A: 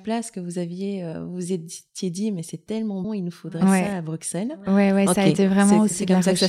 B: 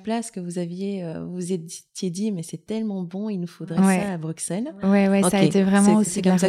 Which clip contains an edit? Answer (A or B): A